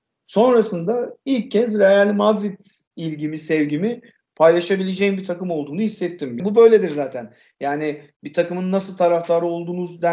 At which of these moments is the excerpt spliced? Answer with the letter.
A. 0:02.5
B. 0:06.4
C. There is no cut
B